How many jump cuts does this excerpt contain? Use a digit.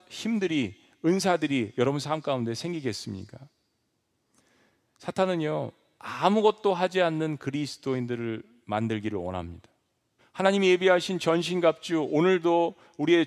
1